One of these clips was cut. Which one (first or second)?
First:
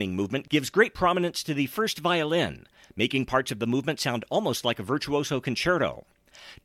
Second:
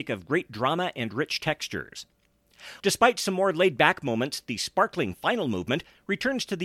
second